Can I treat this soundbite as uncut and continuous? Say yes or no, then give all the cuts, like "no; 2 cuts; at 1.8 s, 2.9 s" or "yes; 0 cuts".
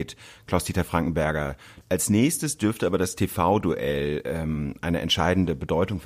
no; 1 cut; at 1.8 s